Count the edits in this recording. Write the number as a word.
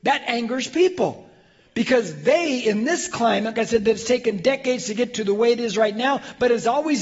one